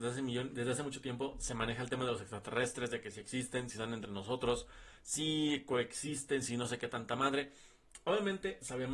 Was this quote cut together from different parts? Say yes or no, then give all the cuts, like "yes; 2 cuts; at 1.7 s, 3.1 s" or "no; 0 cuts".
no; 0 cuts